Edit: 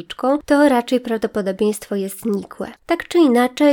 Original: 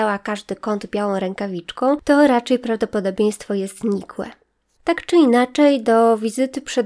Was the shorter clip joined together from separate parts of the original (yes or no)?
yes